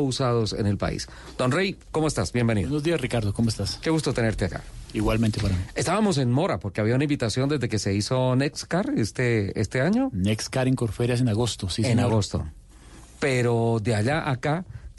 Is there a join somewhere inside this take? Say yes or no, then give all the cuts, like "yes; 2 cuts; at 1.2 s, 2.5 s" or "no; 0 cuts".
no; 0 cuts